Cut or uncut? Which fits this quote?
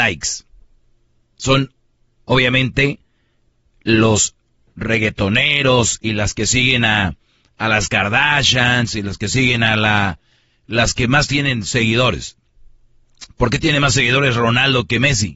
uncut